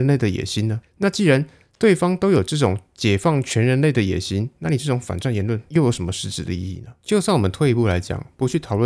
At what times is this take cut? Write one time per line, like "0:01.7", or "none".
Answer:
none